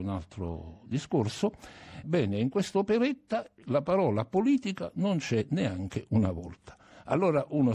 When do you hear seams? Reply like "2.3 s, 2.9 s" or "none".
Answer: 2.0 s